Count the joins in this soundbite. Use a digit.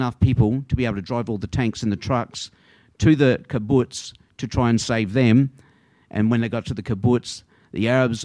0